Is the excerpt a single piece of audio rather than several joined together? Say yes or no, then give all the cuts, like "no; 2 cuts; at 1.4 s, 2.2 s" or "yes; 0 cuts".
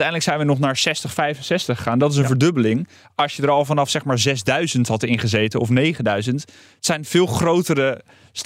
yes; 0 cuts